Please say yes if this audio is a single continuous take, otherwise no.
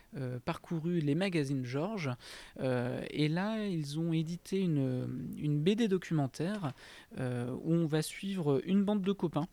yes